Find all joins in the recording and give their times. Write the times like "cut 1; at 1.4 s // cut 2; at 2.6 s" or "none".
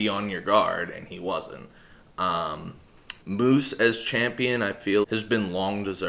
cut 1; at 3.2 s // cut 2; at 5.0 s